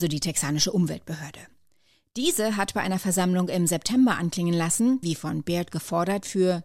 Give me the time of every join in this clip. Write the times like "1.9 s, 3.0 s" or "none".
5.0 s

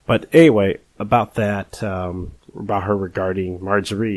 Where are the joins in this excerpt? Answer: none

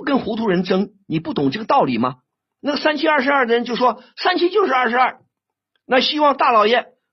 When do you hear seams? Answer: 2.6 s

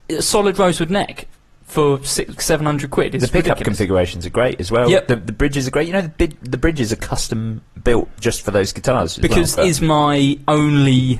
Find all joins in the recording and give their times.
2.4 s, 9.6 s

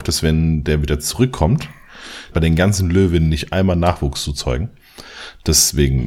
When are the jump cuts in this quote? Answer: 2.3 s

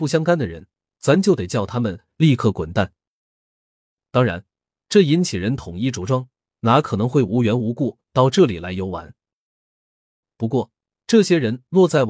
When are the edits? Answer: none

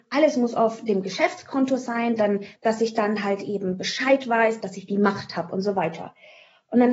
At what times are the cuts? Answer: 2.6 s, 4.6 s

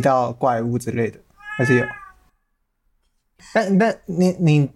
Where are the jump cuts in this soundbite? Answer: 3.4 s

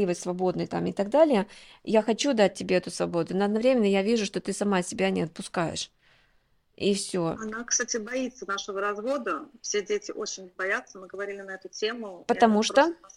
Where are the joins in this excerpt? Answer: none

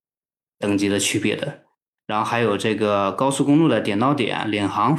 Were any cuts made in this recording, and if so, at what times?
2.0 s

